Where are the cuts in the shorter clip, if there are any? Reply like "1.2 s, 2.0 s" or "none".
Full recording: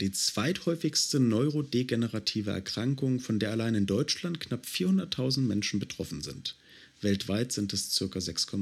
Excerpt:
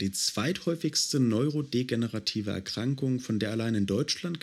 none